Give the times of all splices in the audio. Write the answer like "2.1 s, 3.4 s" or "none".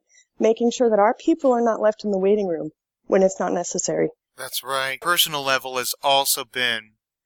5.0 s